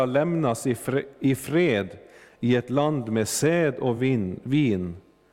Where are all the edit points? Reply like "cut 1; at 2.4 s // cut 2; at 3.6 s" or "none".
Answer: none